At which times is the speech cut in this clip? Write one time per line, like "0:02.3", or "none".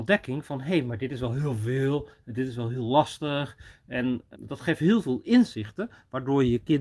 0:04.3